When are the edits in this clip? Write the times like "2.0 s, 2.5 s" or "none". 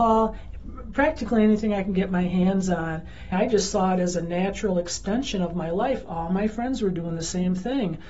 3.3 s